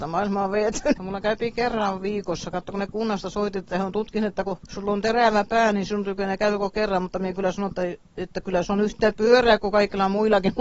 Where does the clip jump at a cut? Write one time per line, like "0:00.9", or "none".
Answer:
0:01.0